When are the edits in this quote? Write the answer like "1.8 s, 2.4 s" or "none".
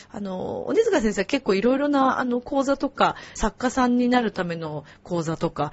3.4 s